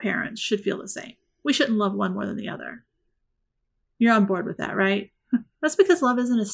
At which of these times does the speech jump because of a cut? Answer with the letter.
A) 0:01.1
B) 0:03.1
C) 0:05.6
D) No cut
C